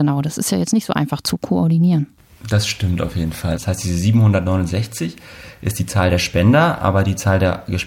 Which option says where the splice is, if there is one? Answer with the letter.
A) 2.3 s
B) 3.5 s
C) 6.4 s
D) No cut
B